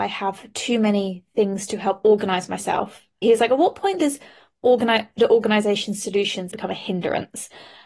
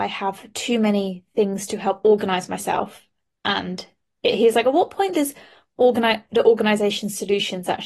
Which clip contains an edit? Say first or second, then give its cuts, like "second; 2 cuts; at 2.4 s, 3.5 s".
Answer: first; 2 cuts; at 3.2 s, 6.5 s